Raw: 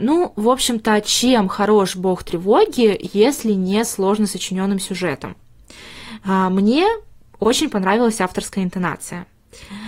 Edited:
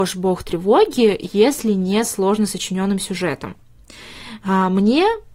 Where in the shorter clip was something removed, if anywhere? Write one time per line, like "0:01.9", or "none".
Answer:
none